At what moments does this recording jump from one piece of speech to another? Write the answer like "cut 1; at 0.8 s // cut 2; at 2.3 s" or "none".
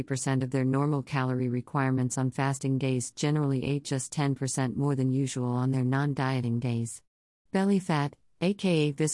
cut 1; at 7.5 s